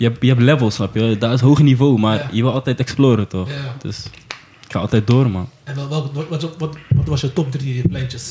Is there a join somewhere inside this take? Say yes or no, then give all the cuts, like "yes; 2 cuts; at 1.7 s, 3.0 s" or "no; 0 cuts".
no; 0 cuts